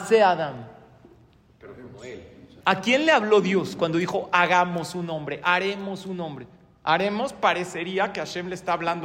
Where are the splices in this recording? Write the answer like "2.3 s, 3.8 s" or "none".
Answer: 2.6 s